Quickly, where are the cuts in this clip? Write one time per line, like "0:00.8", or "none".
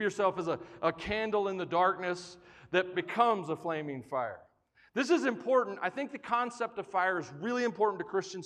0:02.9